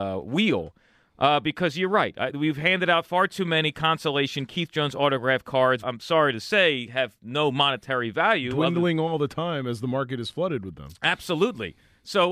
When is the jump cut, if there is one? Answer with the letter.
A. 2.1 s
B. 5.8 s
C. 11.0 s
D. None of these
B